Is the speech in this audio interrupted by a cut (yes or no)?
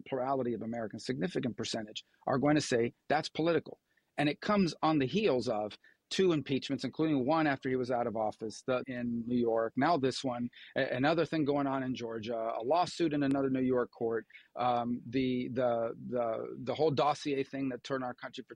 yes